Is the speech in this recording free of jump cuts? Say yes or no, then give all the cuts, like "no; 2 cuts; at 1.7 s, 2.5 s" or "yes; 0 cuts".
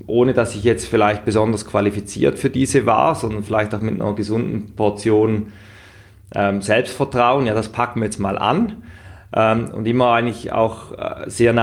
yes; 0 cuts